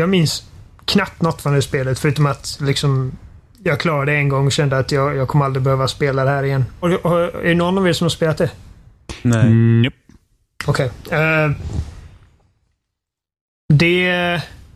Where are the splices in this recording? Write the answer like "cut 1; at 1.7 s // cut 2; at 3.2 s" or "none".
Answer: cut 1; at 6.8 s